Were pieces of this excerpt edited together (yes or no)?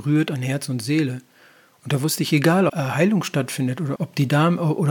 yes